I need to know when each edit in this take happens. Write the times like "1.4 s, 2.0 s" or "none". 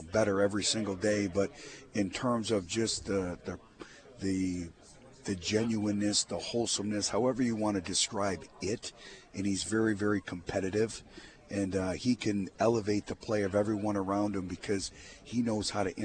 none